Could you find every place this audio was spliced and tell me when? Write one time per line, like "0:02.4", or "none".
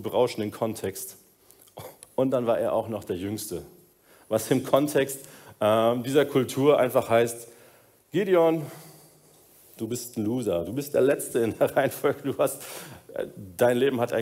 none

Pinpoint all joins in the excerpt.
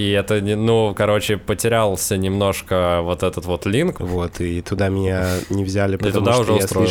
0:04.0

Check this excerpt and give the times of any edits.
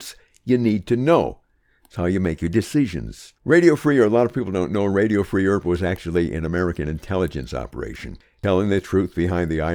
0:03.3

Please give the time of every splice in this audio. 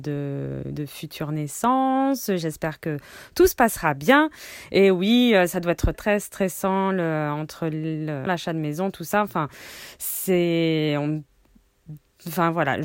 0:05.9
0:08.3

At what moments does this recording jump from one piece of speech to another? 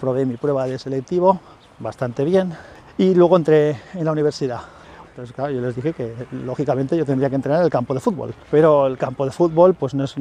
0:05.0
0:08.4

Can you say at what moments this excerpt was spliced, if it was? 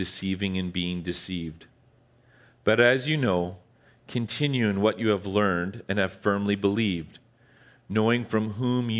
none

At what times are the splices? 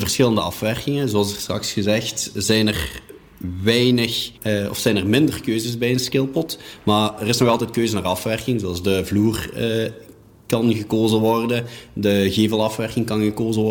0:04.4

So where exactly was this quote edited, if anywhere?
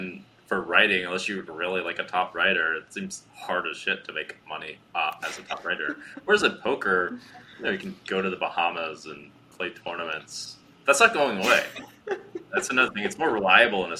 0:01.5

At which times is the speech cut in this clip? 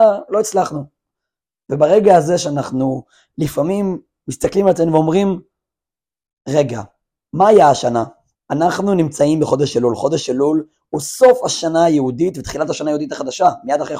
0:08.3

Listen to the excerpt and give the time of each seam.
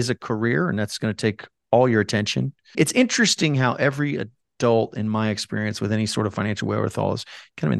0:02.7

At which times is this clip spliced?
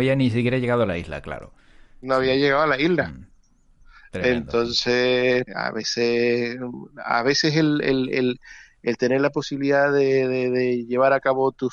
0:05.5

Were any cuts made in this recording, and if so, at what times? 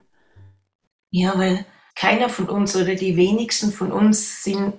0:01.9

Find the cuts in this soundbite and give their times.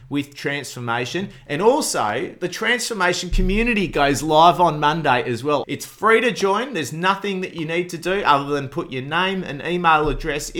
0:05.6

